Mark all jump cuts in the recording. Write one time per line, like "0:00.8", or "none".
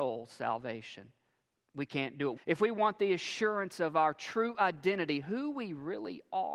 0:02.4